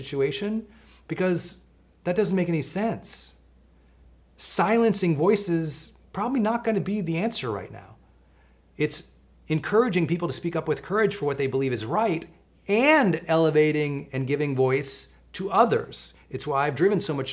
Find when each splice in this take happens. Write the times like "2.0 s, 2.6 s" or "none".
none